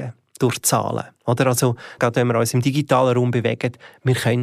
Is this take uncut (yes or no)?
no